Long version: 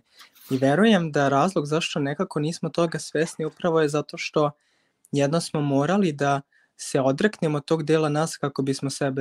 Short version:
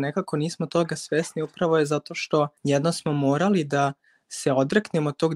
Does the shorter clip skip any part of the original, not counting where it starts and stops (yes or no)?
yes